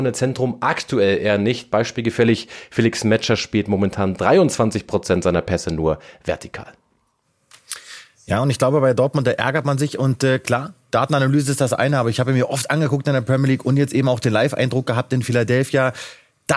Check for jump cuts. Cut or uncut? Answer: uncut